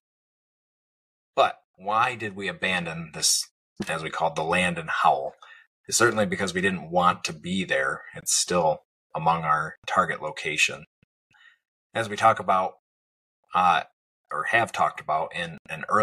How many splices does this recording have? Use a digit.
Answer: 1